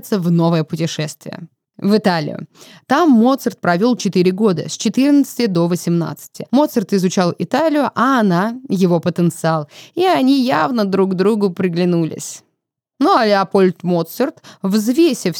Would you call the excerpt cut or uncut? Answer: uncut